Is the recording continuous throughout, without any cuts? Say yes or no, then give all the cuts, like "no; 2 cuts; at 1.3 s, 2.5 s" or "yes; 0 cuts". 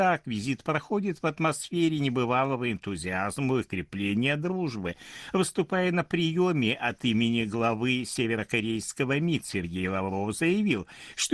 yes; 0 cuts